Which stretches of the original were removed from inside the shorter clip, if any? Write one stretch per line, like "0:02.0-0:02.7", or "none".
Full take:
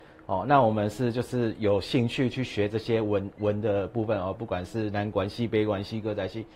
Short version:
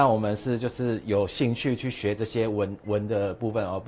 none